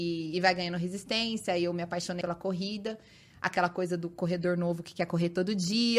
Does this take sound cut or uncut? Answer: cut